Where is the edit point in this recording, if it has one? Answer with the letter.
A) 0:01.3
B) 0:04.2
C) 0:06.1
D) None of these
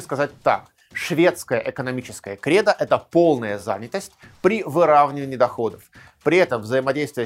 D